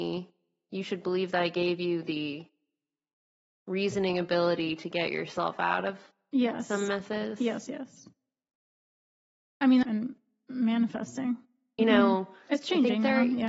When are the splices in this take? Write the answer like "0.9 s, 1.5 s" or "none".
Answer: 9.8 s, 11.8 s